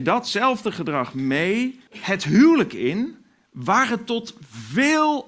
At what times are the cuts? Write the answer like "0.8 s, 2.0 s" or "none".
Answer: 1.9 s